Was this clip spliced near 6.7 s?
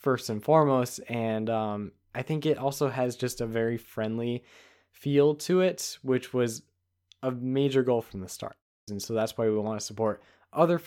no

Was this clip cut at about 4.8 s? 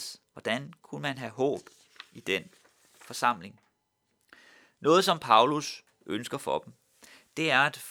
no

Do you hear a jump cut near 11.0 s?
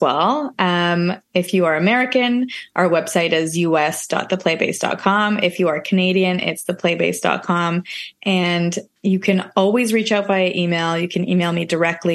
no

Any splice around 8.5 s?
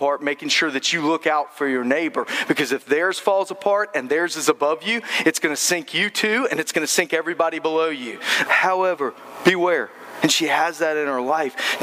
yes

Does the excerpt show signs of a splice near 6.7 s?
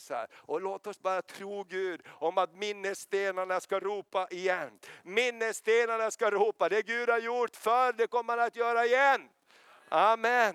no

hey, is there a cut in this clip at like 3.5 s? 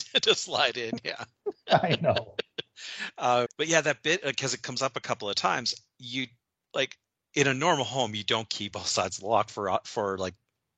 yes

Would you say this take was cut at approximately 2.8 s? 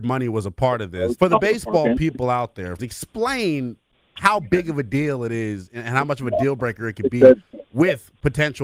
yes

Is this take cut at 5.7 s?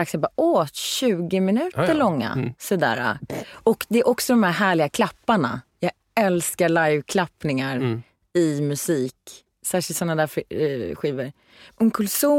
no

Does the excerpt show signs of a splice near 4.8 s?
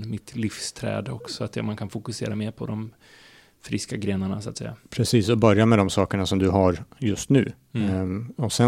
no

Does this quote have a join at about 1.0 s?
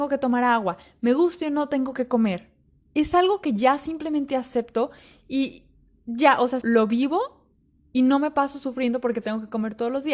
no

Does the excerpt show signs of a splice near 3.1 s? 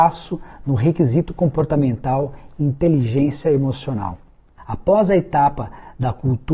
no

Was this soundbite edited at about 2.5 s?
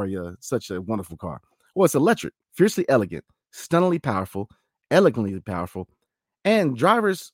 yes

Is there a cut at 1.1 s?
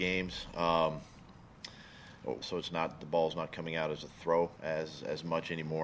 no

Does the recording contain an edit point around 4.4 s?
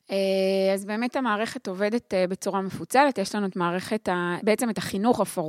yes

